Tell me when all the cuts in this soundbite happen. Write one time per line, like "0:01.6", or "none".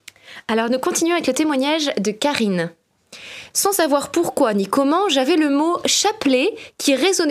0:03.5